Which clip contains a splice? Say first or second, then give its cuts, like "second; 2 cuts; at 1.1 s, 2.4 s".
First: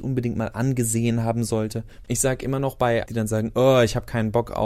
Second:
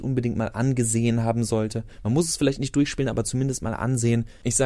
first; 2 cuts; at 2.0 s, 3.1 s